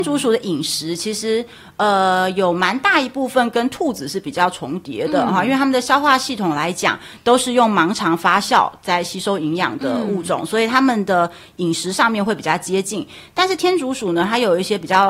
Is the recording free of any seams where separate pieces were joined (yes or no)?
yes